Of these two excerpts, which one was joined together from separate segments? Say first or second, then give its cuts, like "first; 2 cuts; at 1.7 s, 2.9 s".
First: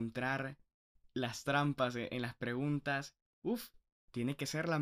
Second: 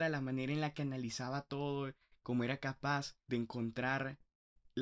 second; 1 cut; at 3.3 s